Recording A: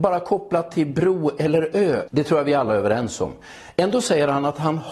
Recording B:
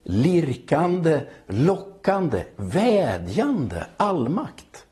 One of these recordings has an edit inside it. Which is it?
A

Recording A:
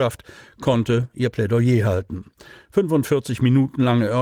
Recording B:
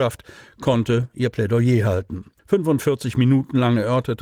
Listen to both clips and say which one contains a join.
B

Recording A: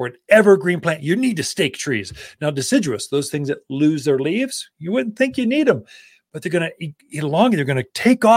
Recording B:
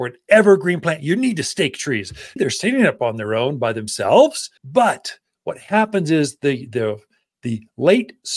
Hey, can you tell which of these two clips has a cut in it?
B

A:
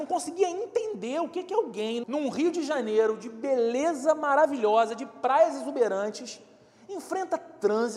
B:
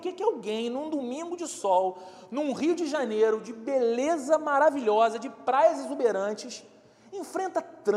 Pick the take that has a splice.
A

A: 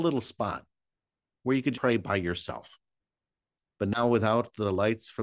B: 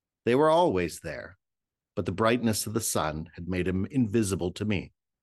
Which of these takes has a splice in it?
A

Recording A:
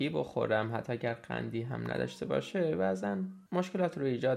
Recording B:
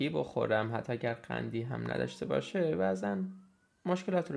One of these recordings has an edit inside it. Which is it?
A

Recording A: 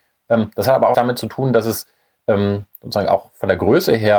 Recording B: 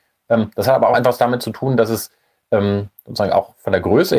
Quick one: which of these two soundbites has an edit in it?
A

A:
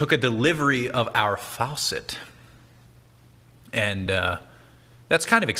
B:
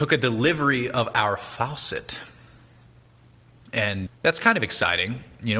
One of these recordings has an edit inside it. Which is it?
B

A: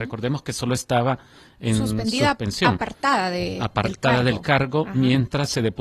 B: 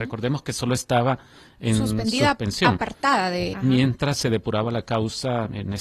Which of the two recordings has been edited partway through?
B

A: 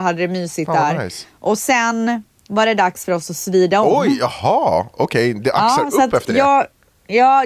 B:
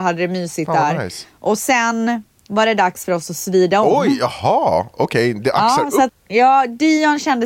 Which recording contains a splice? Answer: B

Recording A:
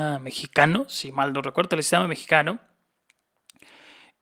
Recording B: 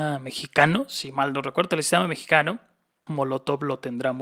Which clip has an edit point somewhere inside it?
B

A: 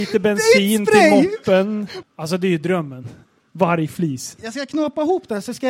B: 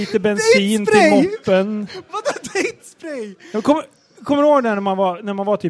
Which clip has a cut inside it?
A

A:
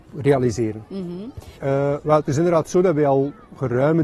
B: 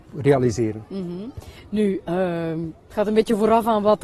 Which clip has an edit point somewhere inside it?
A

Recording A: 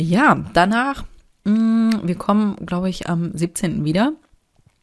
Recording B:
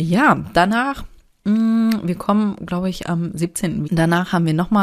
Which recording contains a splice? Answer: B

